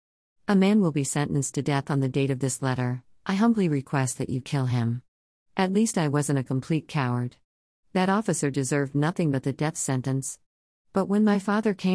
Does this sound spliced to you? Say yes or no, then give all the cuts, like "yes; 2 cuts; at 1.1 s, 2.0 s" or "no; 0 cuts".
no; 0 cuts